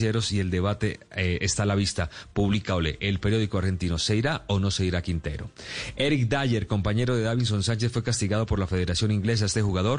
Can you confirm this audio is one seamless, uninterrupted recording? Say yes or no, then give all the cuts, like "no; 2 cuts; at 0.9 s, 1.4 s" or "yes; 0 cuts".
yes; 0 cuts